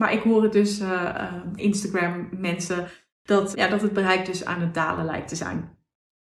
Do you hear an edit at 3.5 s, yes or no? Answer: yes